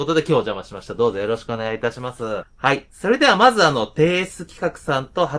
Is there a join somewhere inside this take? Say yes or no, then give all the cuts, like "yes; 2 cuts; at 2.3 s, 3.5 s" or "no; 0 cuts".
yes; 1 cut; at 2.4 s